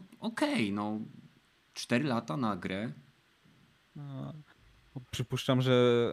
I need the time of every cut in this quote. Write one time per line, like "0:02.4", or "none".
none